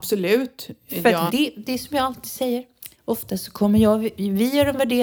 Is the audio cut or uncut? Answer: cut